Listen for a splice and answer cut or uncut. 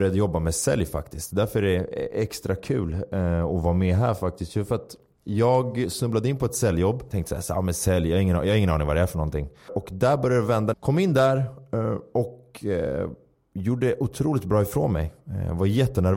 cut